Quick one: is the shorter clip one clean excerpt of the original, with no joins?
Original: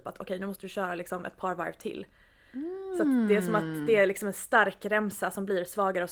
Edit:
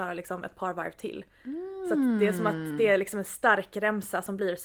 no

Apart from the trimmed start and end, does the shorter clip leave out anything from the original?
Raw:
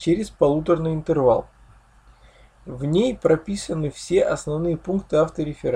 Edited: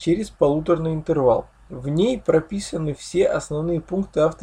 yes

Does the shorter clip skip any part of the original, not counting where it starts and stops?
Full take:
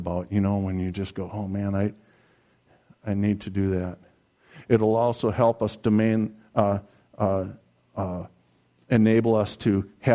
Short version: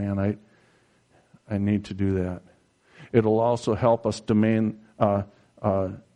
no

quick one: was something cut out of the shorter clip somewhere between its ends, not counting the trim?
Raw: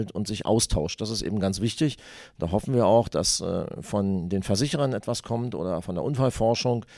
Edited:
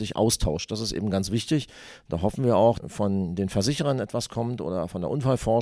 yes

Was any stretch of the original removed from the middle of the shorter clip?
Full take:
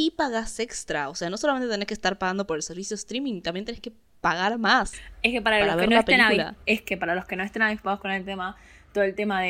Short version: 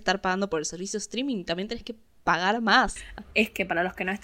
yes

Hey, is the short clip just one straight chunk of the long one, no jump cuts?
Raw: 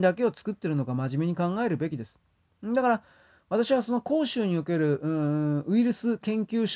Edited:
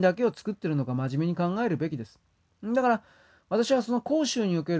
yes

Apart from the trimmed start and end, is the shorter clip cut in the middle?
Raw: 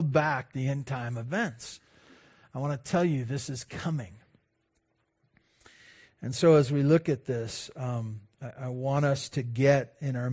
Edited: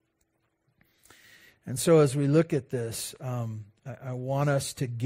no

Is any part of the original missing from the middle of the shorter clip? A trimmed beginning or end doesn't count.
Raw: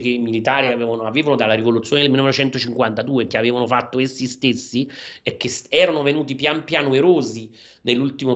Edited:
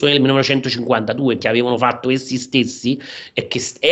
no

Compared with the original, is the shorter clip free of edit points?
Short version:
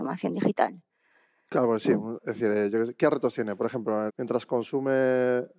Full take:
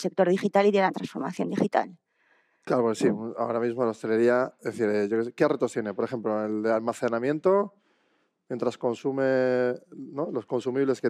no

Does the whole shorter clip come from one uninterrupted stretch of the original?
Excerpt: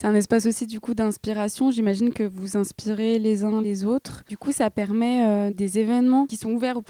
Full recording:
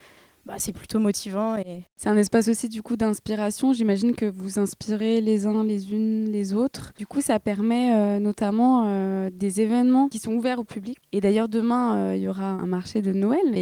no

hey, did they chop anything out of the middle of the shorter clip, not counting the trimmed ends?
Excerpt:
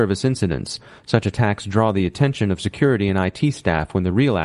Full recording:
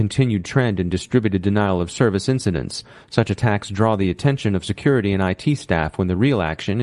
no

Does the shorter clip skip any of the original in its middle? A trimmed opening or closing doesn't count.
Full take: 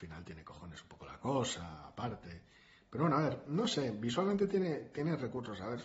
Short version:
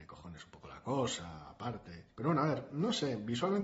yes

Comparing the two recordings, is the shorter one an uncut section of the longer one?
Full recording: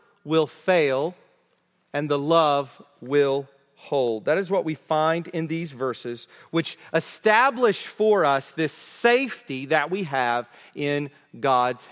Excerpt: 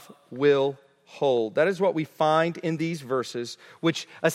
yes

